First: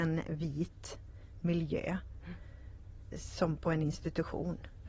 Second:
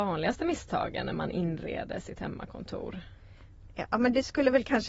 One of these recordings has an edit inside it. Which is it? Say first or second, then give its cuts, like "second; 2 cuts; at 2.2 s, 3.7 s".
first; 1 cut; at 3.1 s